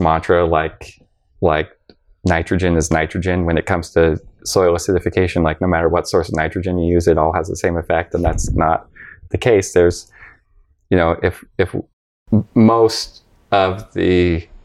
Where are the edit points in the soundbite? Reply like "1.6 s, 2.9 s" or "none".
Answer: none